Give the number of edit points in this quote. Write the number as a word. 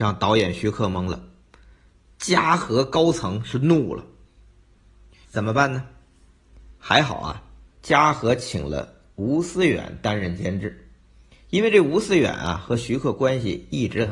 two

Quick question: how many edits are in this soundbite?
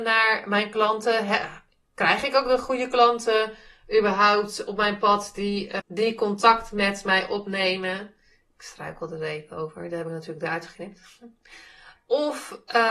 one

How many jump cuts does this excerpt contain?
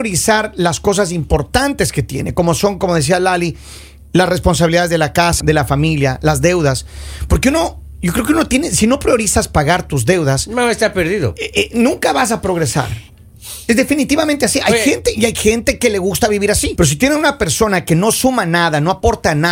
two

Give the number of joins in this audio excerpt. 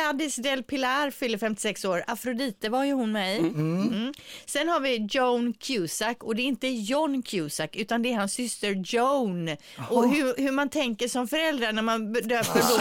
zero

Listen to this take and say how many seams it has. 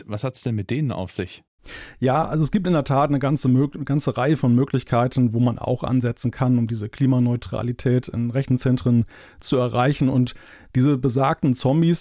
zero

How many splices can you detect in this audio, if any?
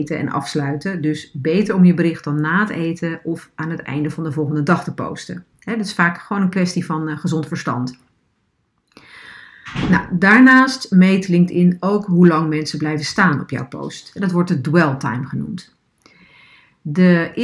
zero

